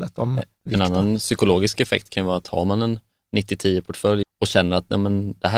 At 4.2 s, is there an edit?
yes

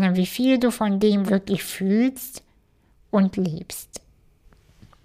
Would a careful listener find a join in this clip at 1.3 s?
yes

